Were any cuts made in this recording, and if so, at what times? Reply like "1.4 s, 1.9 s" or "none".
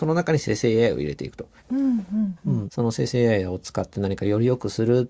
1.6 s, 2.7 s